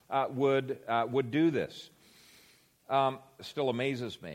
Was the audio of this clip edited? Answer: yes; 1 cut; at 3.4 s

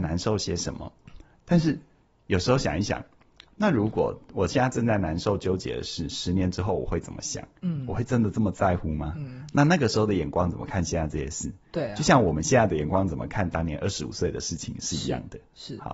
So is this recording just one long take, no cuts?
yes; 0 cuts

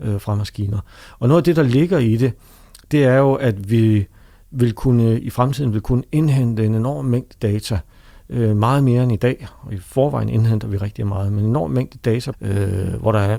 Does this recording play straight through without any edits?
no; 1 cut; at 12.3 s

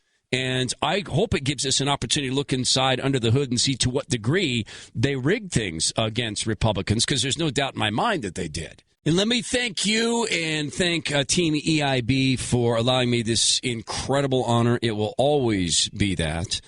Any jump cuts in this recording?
yes; 1 cut; at 8.9 s

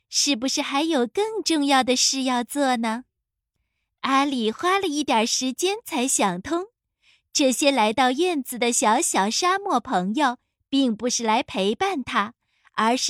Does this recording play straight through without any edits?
yes; 0 cuts

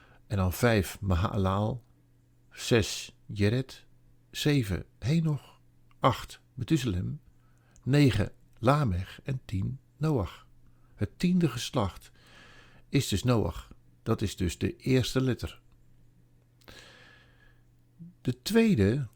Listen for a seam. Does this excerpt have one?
no; 0 cuts

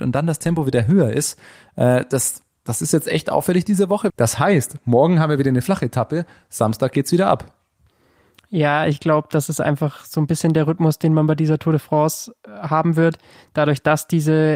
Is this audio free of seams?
no; 1 cut; at 4.1 s

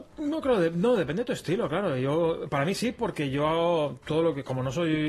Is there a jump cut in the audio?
no; 0 cuts

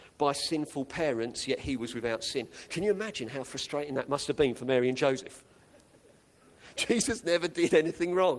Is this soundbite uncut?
yes; 0 cuts

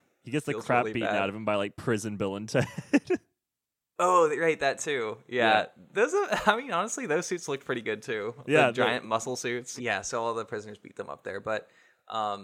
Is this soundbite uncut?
no; 1 cut; at 9.8 s

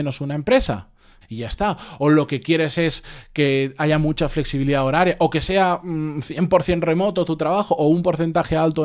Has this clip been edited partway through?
yes; 1 cut; at 1.2 s

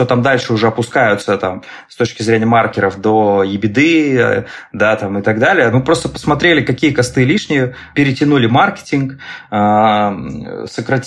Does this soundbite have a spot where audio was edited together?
yes; 2 cuts; at 5.7 s, 7.9 s

